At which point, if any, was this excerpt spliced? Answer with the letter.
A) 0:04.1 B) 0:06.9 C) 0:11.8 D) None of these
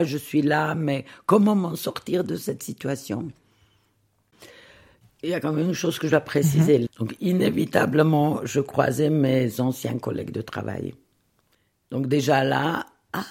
B